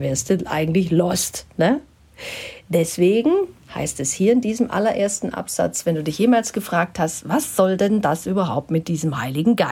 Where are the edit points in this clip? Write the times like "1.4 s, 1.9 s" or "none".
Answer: none